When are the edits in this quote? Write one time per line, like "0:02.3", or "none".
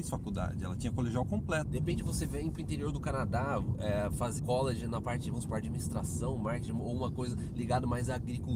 0:01.6
0:04.4